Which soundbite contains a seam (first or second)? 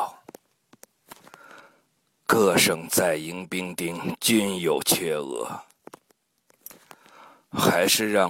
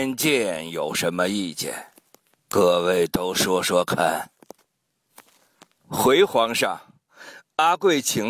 second